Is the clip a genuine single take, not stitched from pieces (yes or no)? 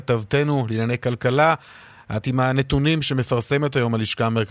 yes